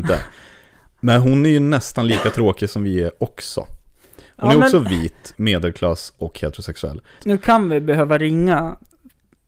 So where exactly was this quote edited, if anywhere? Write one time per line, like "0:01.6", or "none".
0:05.3
0:07.2